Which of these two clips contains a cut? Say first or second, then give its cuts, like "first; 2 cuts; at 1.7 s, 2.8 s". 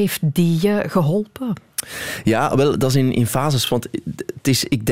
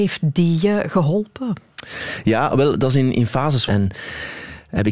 second; 1 cut; at 3.7 s